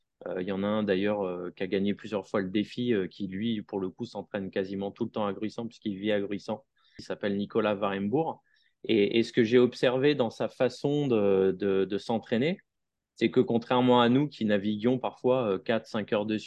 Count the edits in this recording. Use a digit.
1